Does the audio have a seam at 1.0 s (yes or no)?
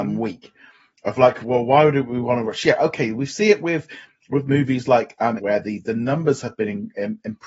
no